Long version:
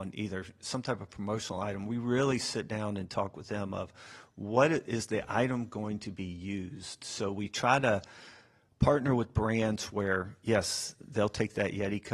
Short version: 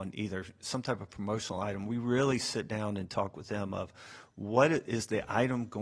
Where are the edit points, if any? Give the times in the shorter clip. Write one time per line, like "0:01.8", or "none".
none